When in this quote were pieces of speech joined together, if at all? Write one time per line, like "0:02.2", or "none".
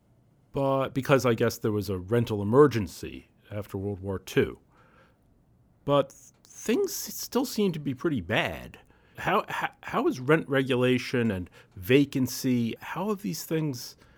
0:09.1
0:12.8